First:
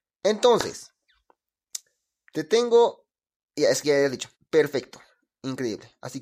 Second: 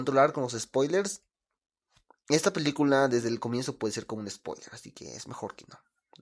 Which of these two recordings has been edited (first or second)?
first